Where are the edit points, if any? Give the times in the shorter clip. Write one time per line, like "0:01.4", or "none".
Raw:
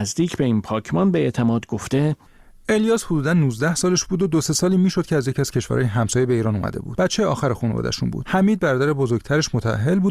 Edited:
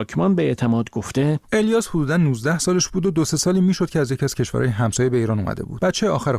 0:01.4